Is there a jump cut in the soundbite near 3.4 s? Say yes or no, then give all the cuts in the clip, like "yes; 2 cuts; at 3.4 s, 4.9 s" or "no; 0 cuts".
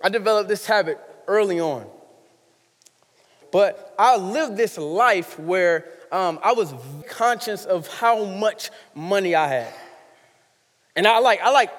yes; 2 cuts; at 3.4 s, 7.0 s